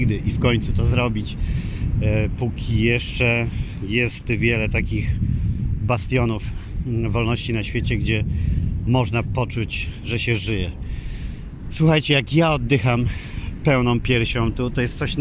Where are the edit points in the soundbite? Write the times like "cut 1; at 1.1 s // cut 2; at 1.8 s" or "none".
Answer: none